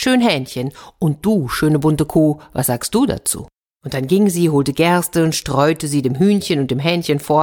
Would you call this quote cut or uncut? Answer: cut